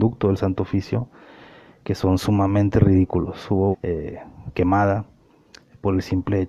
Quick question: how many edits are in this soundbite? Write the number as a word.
one